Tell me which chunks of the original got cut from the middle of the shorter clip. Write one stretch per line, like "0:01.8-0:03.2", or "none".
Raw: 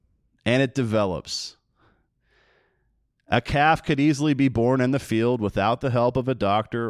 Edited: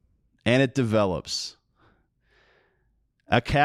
none